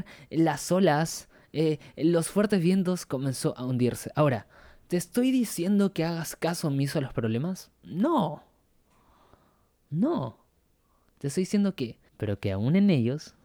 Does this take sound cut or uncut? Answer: cut